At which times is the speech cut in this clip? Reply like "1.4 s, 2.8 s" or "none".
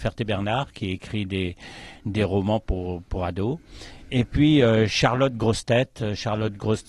none